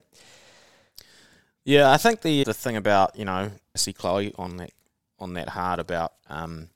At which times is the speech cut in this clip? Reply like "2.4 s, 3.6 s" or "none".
2.4 s, 3.8 s